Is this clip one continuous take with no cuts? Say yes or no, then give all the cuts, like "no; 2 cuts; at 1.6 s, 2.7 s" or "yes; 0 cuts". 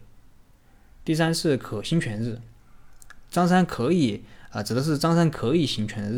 yes; 0 cuts